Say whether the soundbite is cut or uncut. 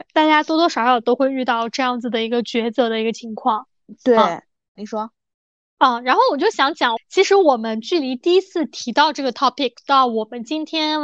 cut